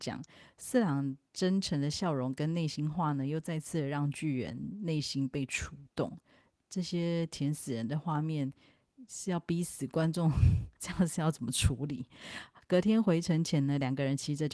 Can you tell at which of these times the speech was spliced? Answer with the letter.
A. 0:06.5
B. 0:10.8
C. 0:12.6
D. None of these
B